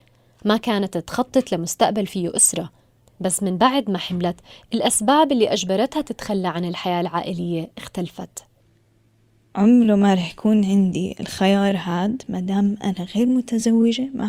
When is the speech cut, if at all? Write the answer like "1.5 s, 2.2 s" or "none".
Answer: none